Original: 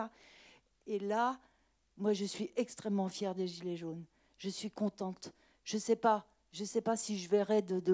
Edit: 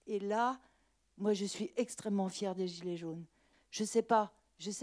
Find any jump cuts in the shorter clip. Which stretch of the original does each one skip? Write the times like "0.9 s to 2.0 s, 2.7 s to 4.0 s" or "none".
4.3 s to 5.5 s